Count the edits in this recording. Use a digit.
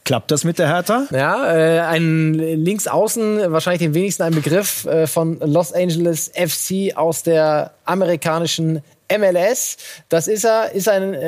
1